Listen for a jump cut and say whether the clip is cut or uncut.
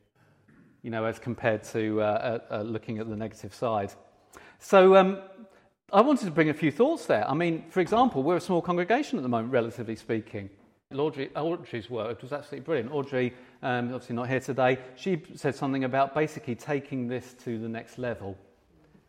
cut